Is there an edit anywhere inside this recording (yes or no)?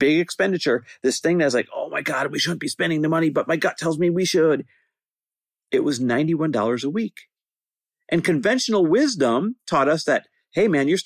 no